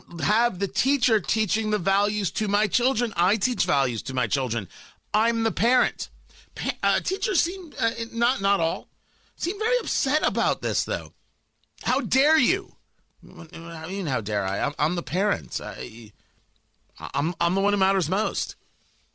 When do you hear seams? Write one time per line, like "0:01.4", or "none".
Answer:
none